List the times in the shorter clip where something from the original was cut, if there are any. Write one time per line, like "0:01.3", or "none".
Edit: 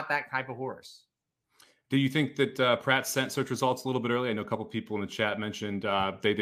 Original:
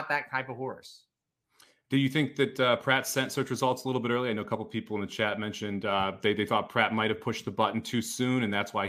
none